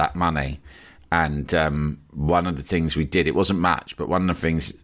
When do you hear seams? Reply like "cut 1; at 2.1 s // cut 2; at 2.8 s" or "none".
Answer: none